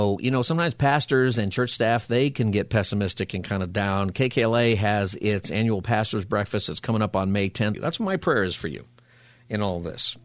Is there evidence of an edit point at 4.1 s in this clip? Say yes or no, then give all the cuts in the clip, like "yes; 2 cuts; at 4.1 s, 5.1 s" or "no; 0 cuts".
no; 1 cut; at 7.7 s